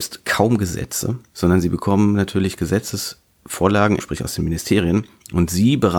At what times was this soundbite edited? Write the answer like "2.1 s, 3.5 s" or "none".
4.0 s